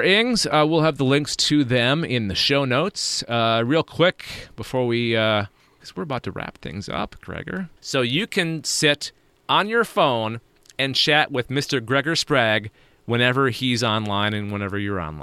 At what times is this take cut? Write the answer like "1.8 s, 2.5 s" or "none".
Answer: 7.8 s